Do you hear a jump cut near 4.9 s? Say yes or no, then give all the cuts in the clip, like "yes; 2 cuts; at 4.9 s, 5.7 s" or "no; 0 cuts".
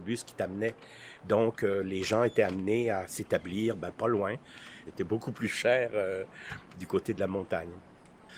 yes; 1 cut; at 4.9 s